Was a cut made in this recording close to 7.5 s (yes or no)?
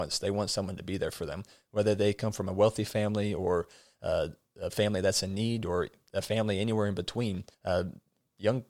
yes